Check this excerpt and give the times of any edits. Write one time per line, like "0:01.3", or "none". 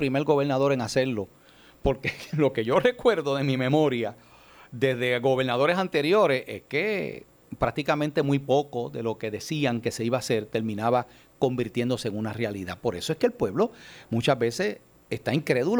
none